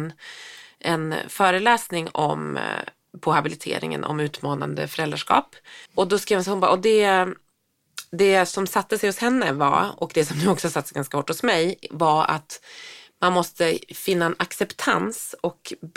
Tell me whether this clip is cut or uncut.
cut